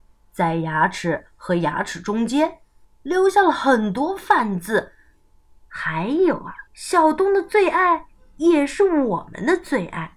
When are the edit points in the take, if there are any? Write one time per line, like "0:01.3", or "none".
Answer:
0:02.8
0:05.6
0:06.7